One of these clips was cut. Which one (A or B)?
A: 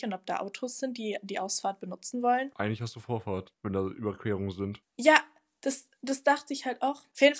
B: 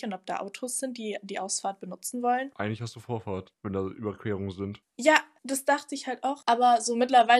B